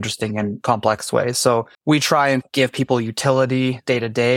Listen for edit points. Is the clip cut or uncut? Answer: cut